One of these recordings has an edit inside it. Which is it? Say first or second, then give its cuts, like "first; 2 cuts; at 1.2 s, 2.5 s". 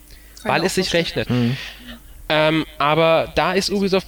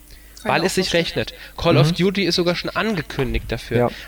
first; 1 cut; at 1.3 s